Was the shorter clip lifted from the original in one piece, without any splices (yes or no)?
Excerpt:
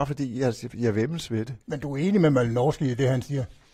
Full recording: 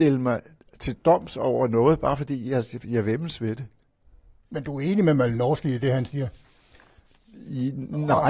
no